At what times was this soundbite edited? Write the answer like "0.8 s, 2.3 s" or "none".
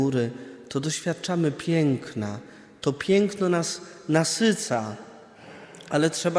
none